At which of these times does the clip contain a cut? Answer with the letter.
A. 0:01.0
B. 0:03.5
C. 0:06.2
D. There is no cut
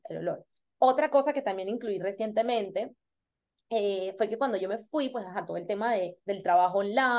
C